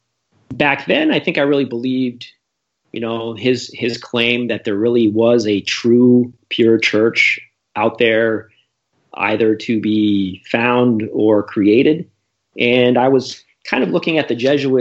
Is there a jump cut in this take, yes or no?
no